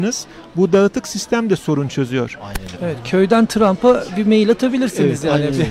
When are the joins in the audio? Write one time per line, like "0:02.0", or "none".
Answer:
0:02.8